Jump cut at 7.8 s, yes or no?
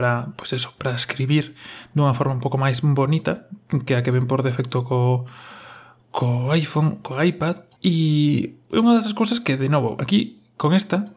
yes